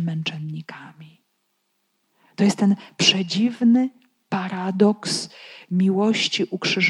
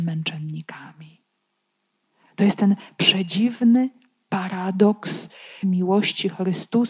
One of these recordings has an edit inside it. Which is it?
second; 1 cut; at 5.6 s

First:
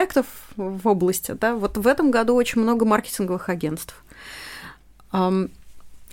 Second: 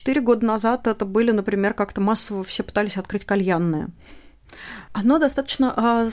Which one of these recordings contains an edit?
second; 1 cut; at 4.9 s

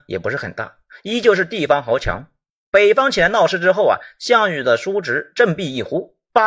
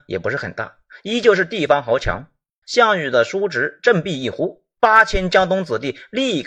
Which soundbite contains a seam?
second; 1 cut; at 2.6 s

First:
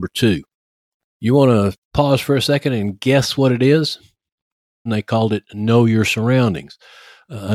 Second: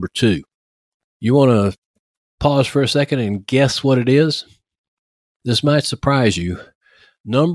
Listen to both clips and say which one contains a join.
first; 2 cuts; at 1.8 s, 4.9 s

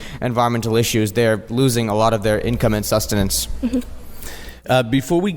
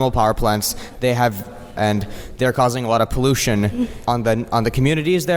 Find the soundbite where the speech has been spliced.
second; 2 cuts; at 1.8 s, 4.1 s

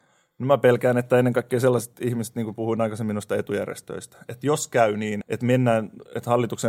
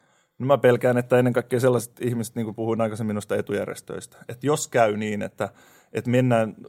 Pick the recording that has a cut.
first; 1 cut; at 5.2 s

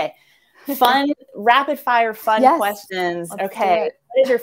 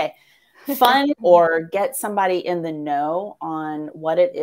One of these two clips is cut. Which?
second; 1 cut; at 1.2 s

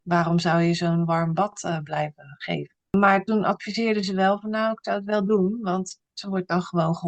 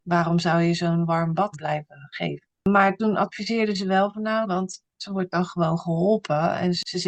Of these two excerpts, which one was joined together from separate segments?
second; 2 cuts; at 1.5 s, 4.4 s

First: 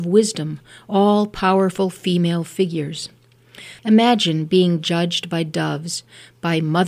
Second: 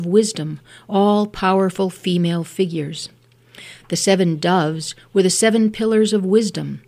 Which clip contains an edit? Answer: first; 1 cut; at 3.8 s

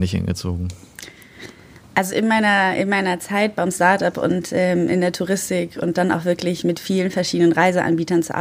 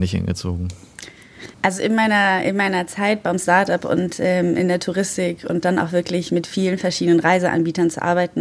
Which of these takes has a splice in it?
second; 1 cut; at 1.5 s

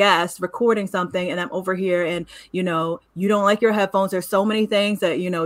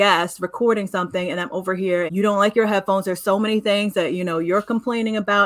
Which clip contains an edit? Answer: second; 1 cut; at 2.1 s

